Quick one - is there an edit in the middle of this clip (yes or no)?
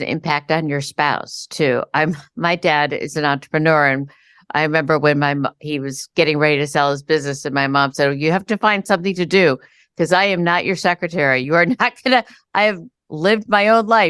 no